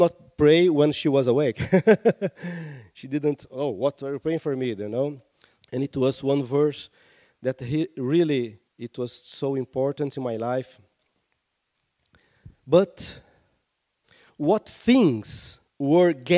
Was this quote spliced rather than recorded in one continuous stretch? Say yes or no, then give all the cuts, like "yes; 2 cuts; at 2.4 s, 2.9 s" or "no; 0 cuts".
yes; 2 cuts; at 5.6 s, 8.7 s